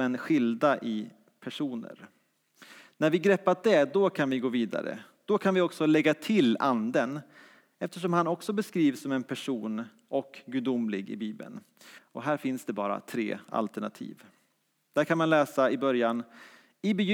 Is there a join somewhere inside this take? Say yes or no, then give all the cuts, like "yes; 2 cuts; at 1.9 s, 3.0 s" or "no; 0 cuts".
yes; 2 cuts; at 12.0 s, 14.9 s